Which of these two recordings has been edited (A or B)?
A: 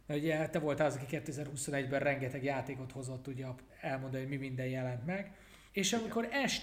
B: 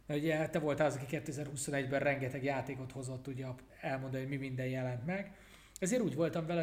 A